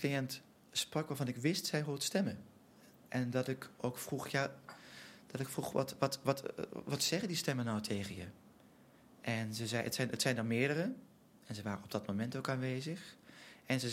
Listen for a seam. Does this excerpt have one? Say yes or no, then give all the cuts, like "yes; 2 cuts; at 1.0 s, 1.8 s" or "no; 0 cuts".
no; 0 cuts